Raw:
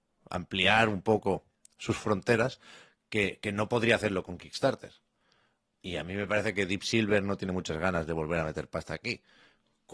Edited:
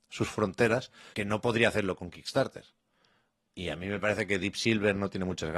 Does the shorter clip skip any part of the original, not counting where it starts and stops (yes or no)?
yes